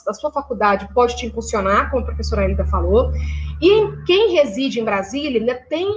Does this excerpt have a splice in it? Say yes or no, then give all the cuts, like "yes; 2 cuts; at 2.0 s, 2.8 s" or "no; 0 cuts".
no; 0 cuts